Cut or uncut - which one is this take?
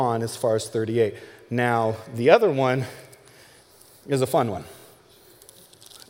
uncut